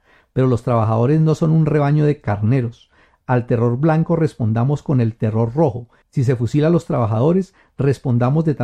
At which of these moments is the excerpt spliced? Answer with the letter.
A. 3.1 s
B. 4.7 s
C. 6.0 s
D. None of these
C